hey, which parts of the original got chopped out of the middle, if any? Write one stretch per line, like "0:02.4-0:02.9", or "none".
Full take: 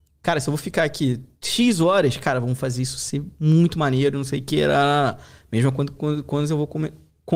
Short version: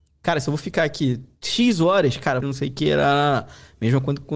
0:02.4-0:04.1